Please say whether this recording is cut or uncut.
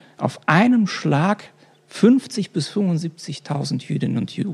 uncut